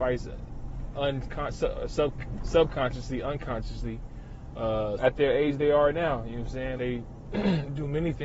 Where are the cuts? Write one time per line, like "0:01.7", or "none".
0:05.0
0:06.8

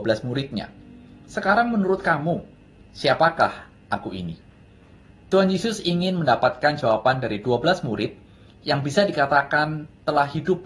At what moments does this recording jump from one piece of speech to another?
none

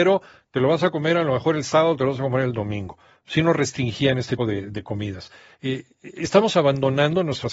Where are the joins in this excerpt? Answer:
0:04.4

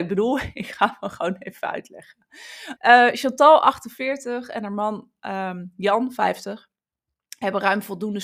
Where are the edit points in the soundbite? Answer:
0:02.8

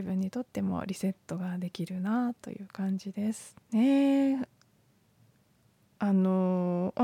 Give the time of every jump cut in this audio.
0:03.6

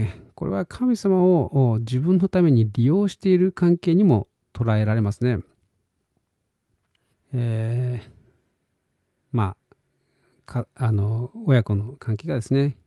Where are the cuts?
0:07.1

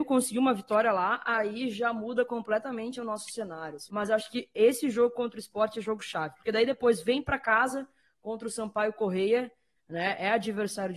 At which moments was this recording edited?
0:03.9
0:09.8

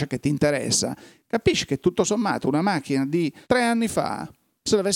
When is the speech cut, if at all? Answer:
0:03.4

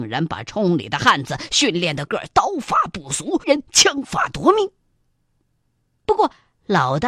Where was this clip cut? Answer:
0:02.1
0:03.4

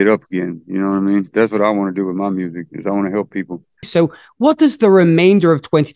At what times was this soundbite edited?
0:03.8

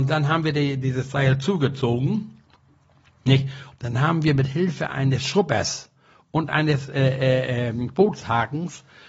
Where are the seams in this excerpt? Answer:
0:03.7

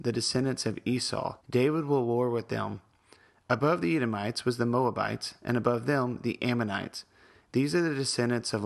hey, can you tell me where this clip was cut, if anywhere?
0:01.4

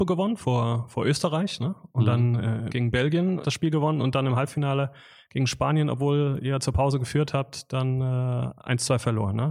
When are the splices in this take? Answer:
0:02.7

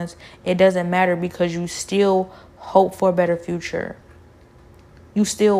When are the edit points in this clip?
none

